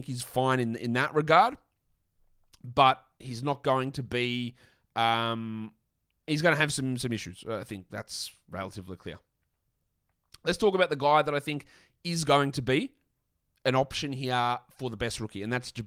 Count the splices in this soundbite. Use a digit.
0